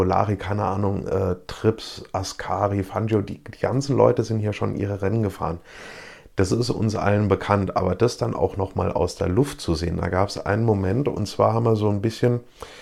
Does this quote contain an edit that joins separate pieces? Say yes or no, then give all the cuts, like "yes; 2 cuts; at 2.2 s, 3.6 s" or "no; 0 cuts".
no; 0 cuts